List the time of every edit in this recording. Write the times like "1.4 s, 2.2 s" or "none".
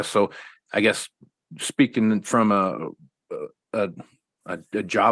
none